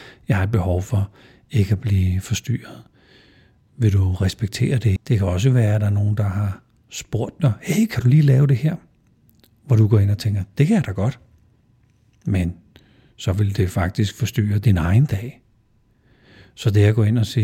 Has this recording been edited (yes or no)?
yes